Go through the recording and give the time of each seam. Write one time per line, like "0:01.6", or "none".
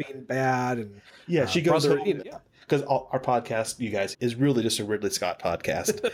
0:02.2
0:04.1